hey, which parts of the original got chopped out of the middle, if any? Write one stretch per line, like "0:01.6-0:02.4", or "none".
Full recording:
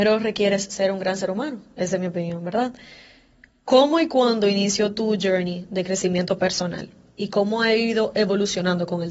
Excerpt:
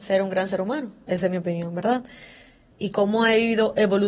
0:03.4-0:07.1

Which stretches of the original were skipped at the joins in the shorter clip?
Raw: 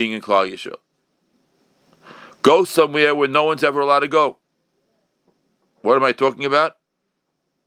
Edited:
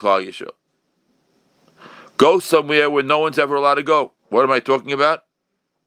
0:04.4-0:05.7

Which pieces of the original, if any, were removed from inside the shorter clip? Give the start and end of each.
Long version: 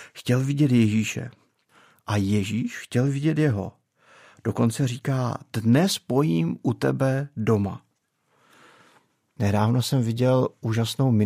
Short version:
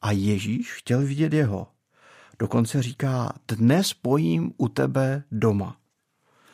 none

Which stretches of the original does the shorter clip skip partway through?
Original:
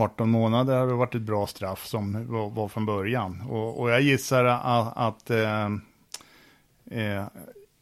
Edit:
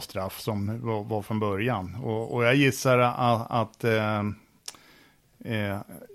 none

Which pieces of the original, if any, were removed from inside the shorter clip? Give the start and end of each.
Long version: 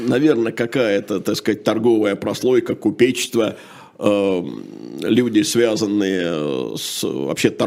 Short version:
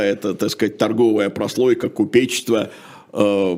none

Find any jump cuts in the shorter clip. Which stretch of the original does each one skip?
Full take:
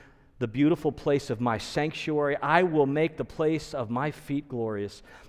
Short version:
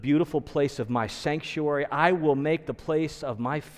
none

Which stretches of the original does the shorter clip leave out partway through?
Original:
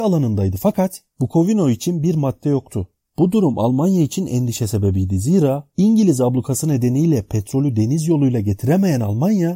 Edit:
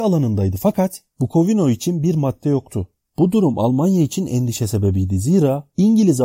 none

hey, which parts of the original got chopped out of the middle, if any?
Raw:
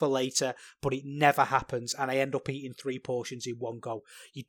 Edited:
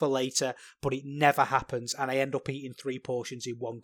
none

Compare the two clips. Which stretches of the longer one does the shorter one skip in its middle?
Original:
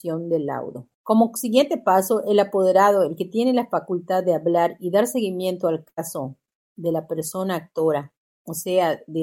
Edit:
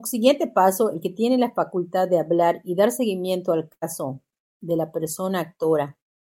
0:02.2-0:03.1

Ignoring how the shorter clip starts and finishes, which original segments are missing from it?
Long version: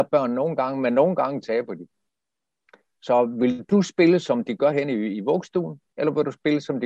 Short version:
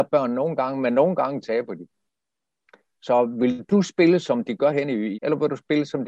0:05.1-0:05.9

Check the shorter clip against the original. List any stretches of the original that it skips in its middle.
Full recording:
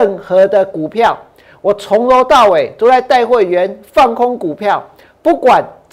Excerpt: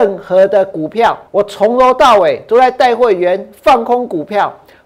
0:01.3-0:01.6

